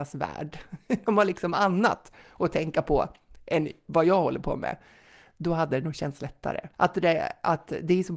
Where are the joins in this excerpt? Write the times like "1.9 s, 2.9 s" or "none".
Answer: 6.7 s